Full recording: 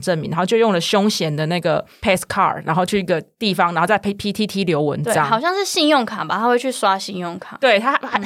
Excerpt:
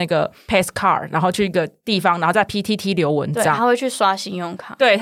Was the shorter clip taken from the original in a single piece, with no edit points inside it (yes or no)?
no